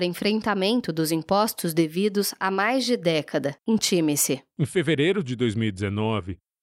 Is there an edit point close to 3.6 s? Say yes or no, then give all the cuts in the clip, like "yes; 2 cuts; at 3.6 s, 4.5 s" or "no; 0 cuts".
yes; 1 cut; at 3.6 s